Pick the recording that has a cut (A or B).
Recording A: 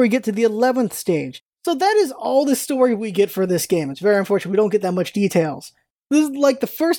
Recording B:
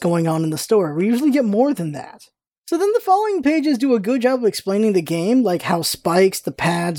A